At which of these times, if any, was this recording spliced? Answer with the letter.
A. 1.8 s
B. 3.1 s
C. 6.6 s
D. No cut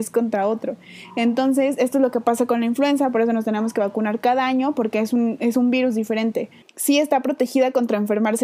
C